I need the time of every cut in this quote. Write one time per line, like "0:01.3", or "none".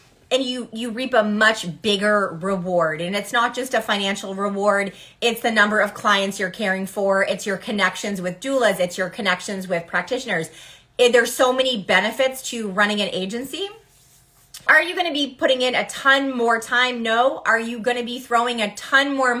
0:14.7